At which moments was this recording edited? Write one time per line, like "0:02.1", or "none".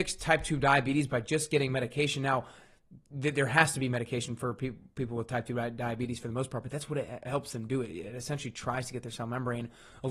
none

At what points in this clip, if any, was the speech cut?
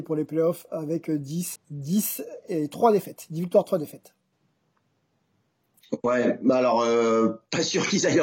0:01.6

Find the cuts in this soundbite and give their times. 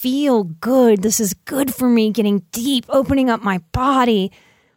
none

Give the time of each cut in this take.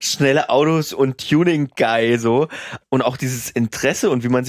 0:02.8

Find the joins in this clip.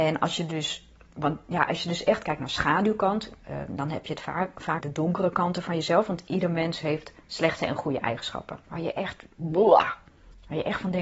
0:04.8
0:08.6

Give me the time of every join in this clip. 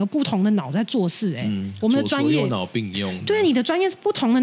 none

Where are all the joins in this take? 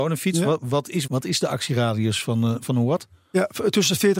0:01.1

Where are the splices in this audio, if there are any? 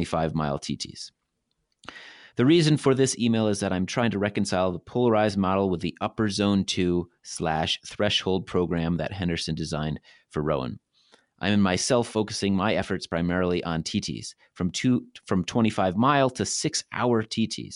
none

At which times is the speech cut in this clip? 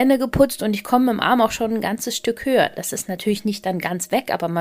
none

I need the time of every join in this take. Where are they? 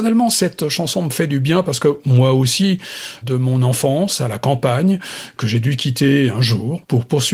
0:03.2

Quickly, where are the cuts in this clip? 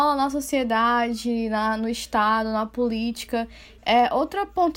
0:03.8

